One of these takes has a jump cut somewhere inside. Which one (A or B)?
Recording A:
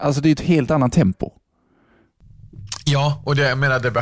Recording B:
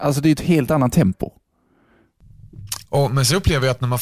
B